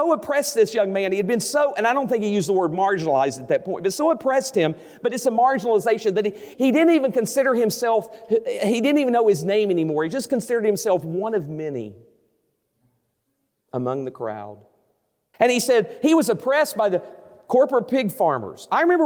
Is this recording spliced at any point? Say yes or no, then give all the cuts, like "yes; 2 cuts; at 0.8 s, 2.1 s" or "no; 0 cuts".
yes; 2 cuts; at 6.5 s, 15.3 s